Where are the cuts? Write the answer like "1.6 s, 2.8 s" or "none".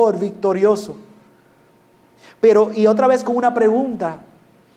none